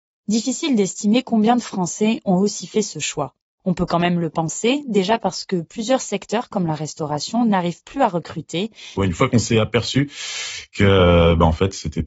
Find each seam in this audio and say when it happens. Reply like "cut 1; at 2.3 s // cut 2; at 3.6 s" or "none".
cut 1; at 9.0 s